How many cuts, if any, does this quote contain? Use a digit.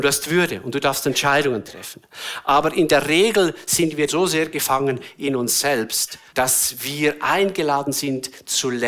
2